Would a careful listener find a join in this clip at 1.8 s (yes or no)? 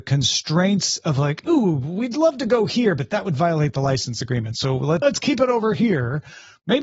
no